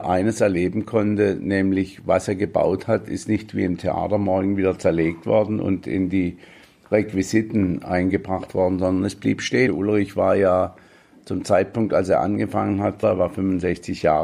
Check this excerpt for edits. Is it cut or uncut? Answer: cut